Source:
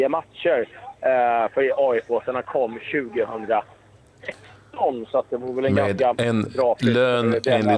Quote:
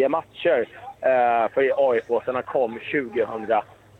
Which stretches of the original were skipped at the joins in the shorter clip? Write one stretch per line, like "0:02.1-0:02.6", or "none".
none